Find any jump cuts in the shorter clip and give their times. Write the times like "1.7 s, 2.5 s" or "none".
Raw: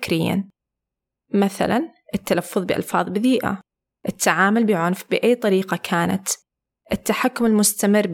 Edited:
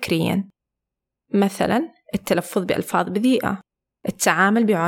none